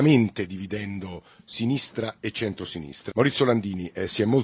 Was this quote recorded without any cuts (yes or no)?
no